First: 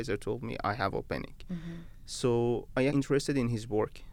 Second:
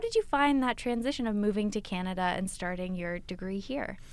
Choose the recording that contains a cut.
first; 1 cut; at 2.9 s

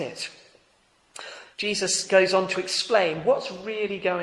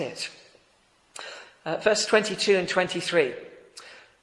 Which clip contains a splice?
first; 1 cut; at 1.5 s

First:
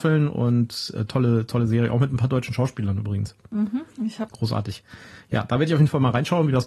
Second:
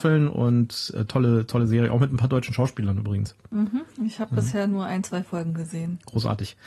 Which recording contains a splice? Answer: first; 1 cut; at 4.3 s

